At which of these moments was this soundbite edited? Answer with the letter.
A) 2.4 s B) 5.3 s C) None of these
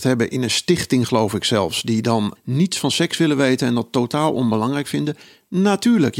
A